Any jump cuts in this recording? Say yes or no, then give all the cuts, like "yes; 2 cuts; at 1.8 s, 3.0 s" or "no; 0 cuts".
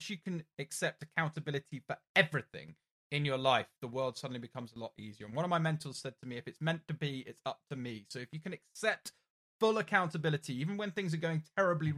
no; 0 cuts